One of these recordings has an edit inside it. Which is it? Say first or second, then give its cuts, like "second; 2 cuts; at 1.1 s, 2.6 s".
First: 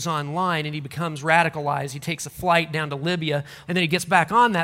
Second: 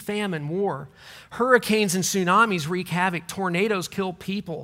first; 1 cut; at 3.7 s